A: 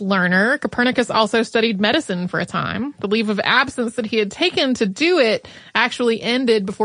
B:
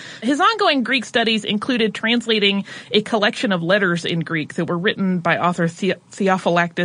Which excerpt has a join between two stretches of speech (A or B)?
A